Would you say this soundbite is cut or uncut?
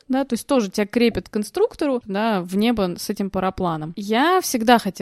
cut